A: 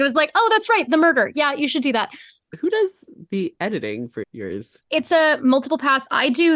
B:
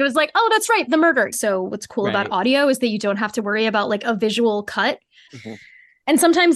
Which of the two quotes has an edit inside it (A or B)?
B